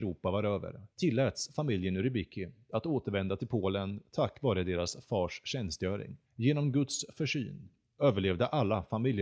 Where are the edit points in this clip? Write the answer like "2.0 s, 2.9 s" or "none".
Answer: 0.9 s, 6.2 s

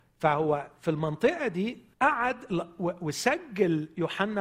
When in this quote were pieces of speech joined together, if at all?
1.9 s

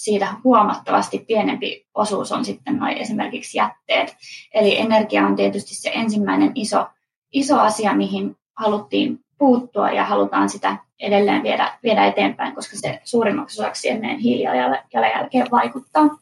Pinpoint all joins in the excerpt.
none

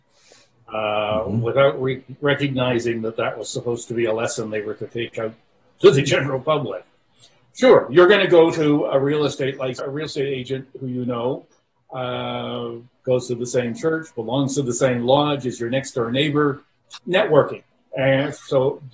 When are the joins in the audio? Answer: 9.8 s, 13.0 s, 17.0 s

